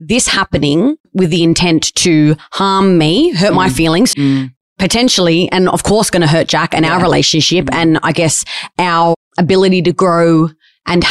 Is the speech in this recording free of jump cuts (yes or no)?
no